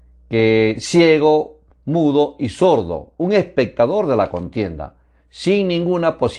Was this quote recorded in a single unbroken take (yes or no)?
yes